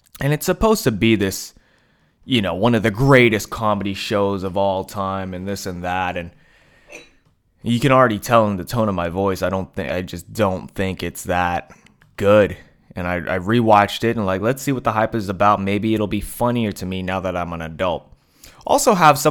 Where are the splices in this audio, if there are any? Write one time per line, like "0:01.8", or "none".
none